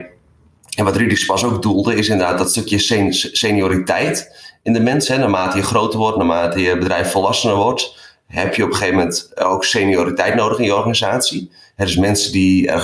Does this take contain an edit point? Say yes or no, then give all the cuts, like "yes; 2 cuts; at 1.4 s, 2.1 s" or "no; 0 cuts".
no; 0 cuts